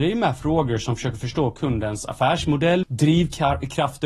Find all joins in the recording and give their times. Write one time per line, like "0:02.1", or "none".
0:02.8